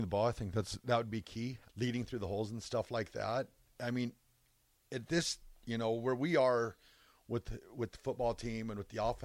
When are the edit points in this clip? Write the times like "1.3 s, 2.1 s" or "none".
1.7 s